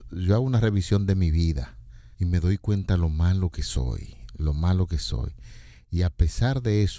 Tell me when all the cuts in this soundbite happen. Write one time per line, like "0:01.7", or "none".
0:02.1

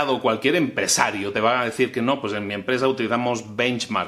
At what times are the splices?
none

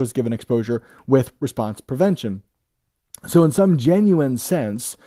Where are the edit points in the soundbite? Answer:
none

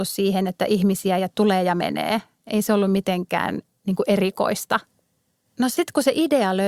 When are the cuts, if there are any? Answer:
0:05.4

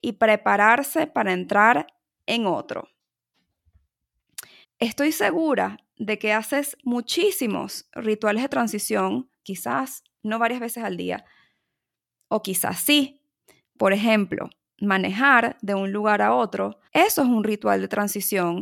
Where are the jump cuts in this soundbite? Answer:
0:04.6
0:09.4
0:16.9

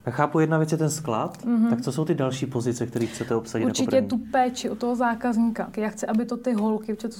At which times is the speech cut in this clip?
0:05.7

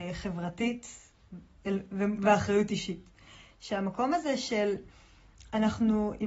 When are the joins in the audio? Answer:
none

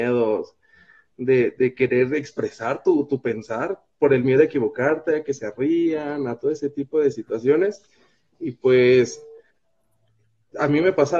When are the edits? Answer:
none

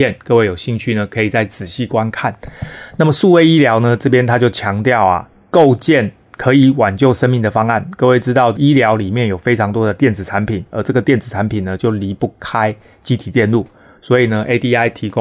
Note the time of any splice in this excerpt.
none

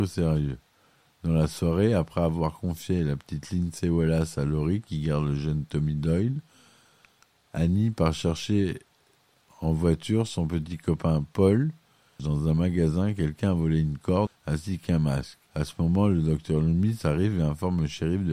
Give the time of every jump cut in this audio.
0:12.2
0:14.3
0:15.5

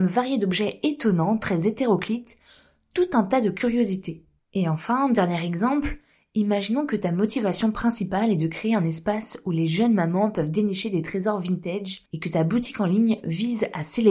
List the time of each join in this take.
0:04.4
0:12.1

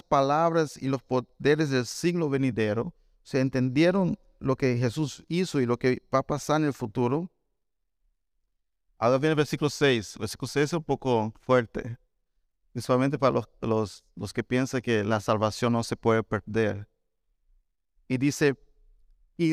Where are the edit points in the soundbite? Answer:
none

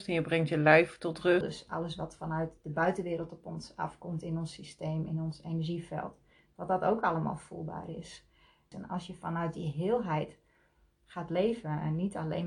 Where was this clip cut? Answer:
0:01.4
0:08.7

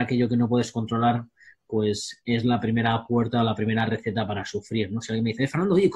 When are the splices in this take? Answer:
none

